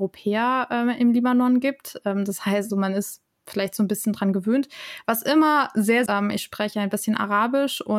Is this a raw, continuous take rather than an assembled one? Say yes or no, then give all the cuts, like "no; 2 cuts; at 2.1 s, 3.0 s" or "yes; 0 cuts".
no; 2 cuts; at 2.7 s, 6.1 s